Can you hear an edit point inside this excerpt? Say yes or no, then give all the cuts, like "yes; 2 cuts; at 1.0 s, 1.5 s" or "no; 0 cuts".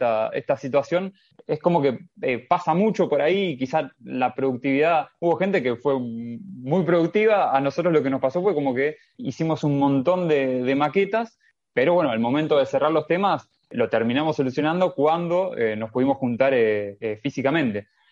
no; 0 cuts